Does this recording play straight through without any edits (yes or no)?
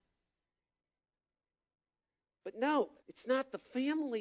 no